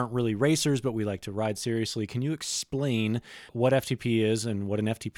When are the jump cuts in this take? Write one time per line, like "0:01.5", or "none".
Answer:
0:03.5